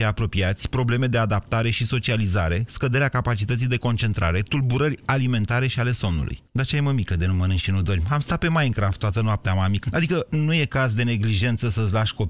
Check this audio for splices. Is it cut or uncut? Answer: cut